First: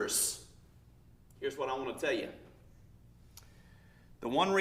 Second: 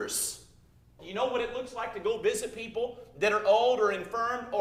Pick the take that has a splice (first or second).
second